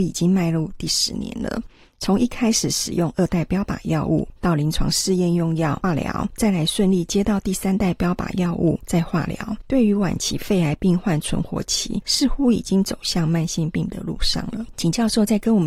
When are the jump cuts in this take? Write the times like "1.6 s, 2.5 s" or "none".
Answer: none